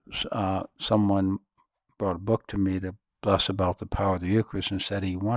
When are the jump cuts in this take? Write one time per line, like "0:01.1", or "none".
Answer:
none

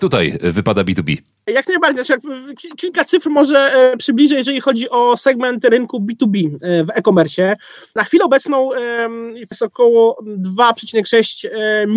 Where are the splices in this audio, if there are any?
none

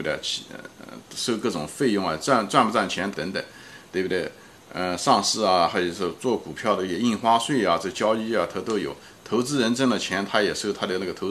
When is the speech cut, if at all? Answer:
0:03.1

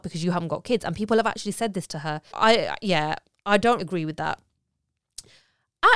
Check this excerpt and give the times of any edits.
0:02.3
0:03.8

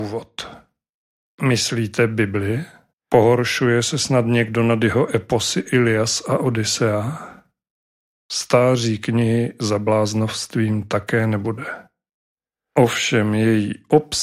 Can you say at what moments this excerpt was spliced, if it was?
0:02.9

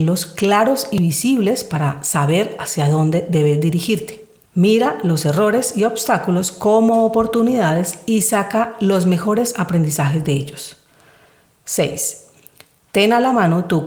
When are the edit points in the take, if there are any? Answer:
0:04.5

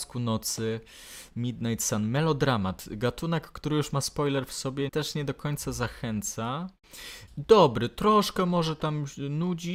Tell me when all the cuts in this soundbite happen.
0:04.9
0:07.3

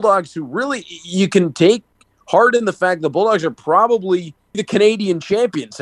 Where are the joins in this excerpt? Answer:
0:04.5

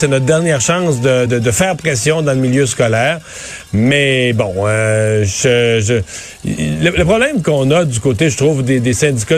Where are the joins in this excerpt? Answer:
none

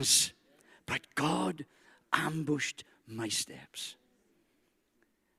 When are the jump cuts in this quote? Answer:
none

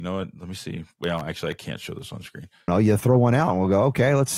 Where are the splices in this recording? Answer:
0:02.7

